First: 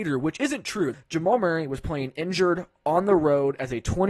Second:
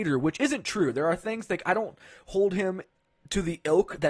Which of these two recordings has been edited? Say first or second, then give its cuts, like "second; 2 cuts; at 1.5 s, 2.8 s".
first; 1 cut; at 0.9 s